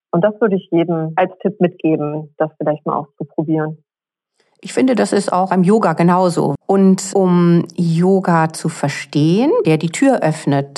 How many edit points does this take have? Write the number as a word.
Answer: two